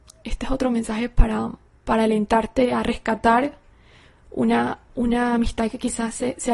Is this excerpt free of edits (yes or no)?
yes